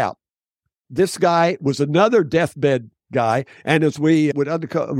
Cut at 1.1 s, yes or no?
no